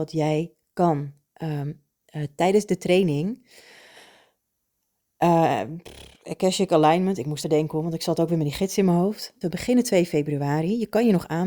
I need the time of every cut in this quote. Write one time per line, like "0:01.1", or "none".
0:07.4
0:09.4